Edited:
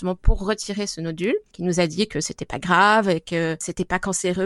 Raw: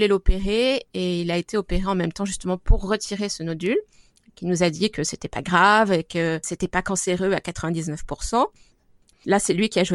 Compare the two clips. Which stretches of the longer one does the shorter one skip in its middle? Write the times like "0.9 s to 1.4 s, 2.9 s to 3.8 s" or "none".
3.9 s to 4.3 s